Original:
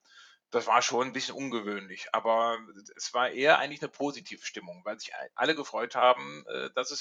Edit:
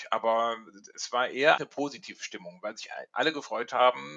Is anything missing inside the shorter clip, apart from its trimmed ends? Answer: yes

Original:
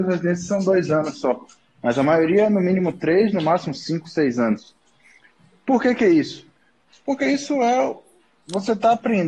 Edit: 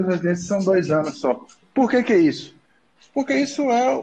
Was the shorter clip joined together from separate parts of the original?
yes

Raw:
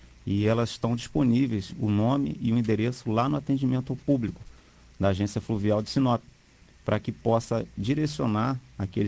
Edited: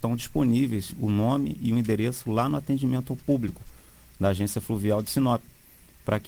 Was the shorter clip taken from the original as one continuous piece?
yes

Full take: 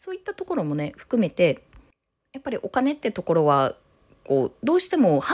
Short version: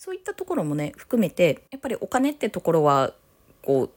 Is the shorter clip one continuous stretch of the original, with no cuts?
no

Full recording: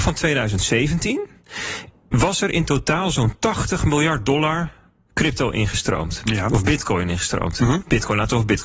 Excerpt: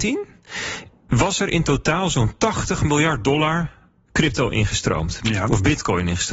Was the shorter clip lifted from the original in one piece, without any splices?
yes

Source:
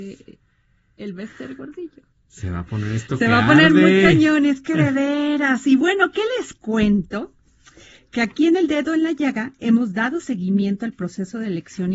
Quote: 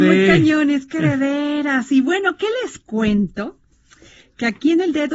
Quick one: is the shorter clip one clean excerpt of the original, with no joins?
yes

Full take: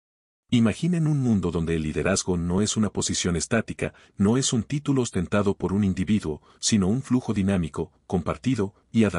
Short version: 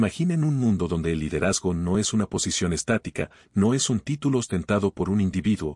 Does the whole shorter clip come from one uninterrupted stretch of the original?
yes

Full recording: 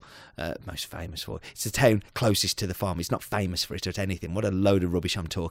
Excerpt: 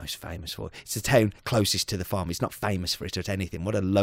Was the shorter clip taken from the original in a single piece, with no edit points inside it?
yes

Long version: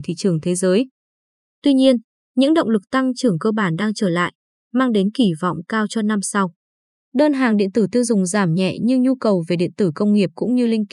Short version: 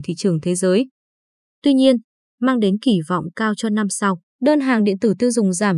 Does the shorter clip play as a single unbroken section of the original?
no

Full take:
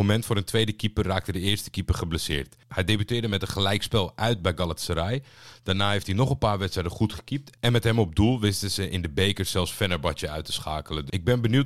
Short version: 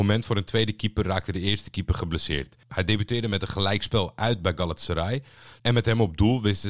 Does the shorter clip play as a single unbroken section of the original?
no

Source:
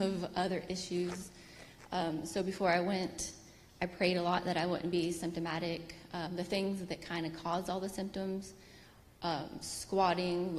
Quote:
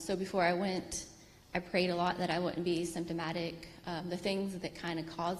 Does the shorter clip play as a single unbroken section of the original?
yes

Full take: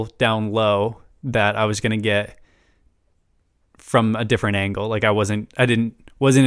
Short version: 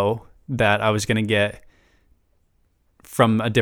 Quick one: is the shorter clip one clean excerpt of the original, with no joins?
yes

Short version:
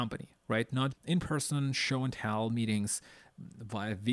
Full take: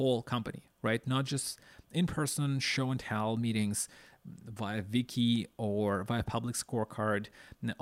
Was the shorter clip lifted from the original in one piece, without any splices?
no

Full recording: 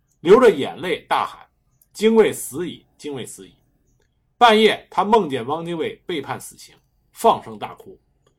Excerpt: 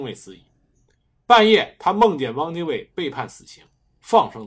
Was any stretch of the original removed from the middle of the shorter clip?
no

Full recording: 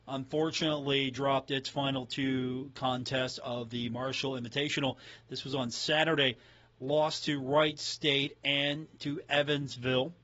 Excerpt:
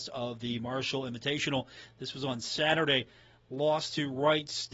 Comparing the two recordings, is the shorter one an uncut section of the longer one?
yes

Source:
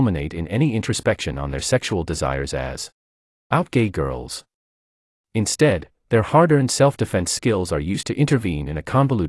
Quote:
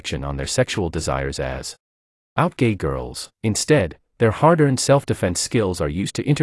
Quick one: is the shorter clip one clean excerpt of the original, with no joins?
no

